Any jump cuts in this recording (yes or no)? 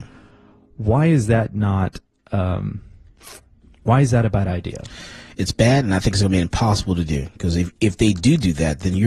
no